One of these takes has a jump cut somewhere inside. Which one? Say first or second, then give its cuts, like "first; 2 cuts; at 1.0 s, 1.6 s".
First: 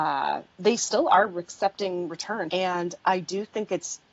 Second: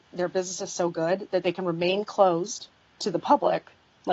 first; 1 cut; at 2.5 s